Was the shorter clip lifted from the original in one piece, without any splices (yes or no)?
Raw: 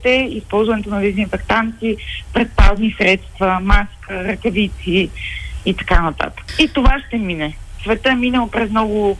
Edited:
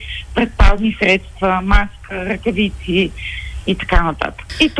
yes